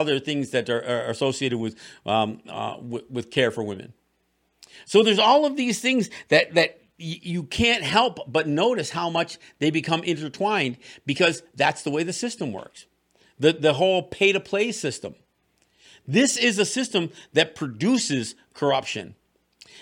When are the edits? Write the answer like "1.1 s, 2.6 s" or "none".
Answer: none